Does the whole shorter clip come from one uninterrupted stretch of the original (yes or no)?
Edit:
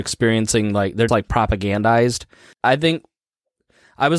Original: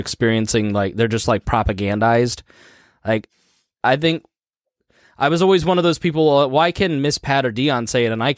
no